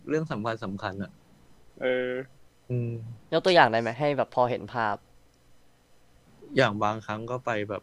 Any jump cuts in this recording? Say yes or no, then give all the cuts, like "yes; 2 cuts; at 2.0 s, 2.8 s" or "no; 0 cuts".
yes; 1 cut; at 3.2 s